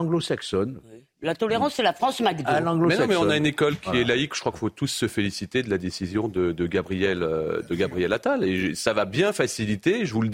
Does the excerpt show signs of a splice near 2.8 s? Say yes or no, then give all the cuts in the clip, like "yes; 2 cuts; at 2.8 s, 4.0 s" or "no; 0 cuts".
no; 0 cuts